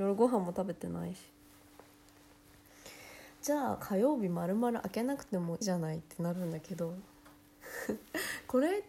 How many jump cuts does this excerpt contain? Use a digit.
1